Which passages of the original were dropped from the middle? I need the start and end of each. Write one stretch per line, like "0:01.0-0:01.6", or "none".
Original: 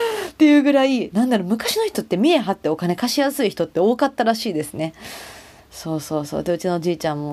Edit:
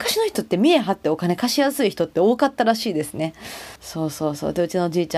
0:05.4-0:05.7